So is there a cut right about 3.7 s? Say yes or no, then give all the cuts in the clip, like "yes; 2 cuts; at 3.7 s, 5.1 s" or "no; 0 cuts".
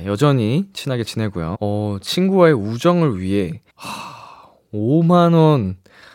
yes; 2 cuts; at 1.5 s, 3.7 s